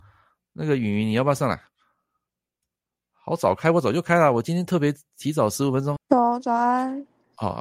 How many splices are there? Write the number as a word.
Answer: one